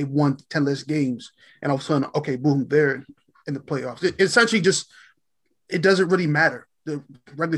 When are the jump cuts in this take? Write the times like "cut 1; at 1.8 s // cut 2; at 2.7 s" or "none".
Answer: none